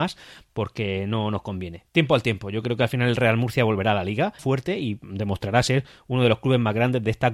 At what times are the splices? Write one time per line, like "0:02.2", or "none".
0:01.9
0:04.4